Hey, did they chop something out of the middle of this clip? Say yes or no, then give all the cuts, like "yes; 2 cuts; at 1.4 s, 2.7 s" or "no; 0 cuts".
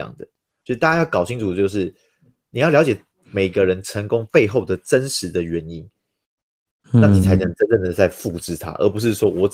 no; 0 cuts